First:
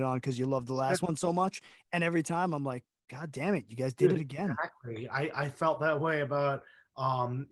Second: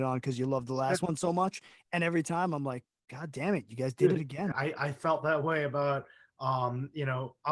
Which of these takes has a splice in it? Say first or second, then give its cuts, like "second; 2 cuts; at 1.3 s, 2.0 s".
second; 1 cut; at 4.5 s